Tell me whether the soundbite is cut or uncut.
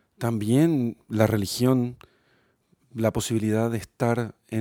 uncut